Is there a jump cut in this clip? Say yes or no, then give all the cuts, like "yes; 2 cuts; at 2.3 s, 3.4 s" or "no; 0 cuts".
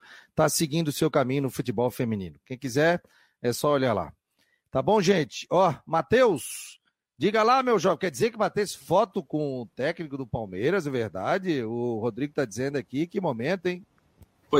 no; 0 cuts